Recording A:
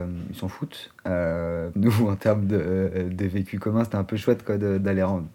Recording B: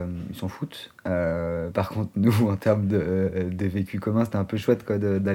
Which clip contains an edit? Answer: A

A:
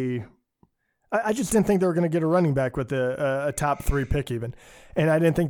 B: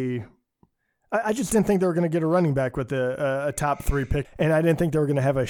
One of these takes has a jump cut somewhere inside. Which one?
B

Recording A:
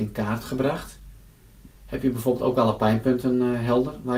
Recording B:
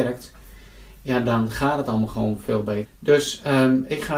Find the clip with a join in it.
B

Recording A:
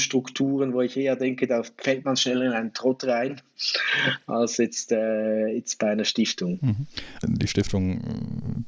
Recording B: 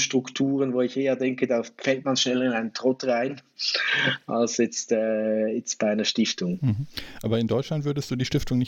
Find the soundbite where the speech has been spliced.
A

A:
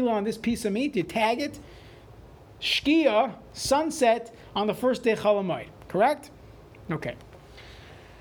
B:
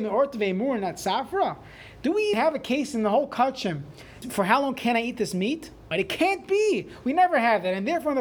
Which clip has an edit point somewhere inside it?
B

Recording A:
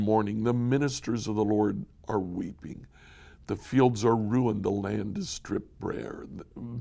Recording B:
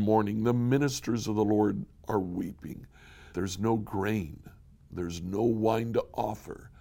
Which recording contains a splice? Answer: B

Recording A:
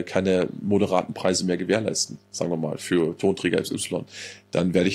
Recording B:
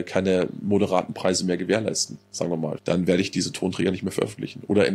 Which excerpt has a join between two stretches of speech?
B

